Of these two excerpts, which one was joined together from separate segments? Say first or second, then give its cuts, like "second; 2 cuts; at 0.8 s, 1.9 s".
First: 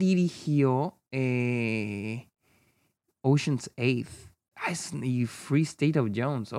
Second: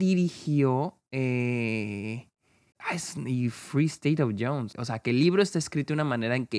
second; 2 cuts; at 2.7 s, 4.7 s